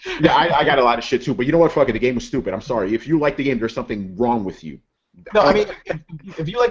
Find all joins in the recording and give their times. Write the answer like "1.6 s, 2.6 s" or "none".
5.3 s